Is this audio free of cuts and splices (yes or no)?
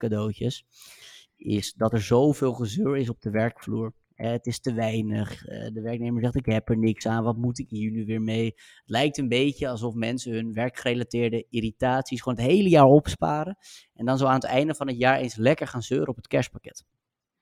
yes